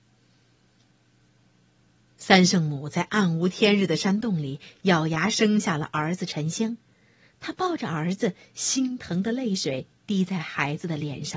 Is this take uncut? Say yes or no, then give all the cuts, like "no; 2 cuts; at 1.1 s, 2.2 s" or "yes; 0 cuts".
yes; 0 cuts